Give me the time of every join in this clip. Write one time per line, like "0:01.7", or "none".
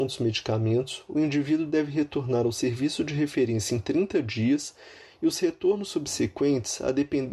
none